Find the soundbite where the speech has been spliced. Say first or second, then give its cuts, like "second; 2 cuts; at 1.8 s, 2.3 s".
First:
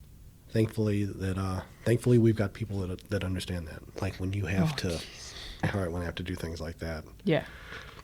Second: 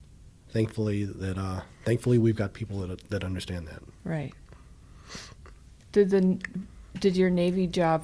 first; 2 cuts; at 3.9 s, 5.6 s